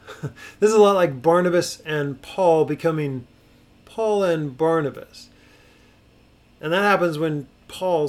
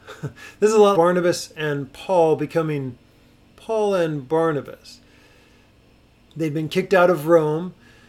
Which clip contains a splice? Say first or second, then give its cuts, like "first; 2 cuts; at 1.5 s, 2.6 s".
second; 2 cuts; at 0.9 s, 6.3 s